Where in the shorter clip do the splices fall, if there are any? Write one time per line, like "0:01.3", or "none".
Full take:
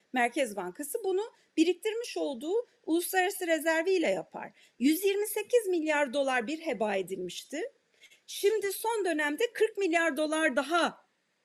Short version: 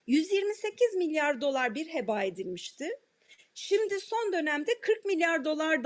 none